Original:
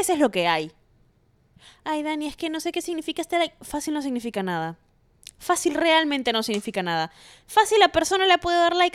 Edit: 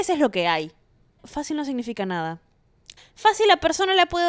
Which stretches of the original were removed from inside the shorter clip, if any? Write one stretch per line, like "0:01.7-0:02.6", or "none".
0:01.2-0:03.6
0:05.3-0:07.3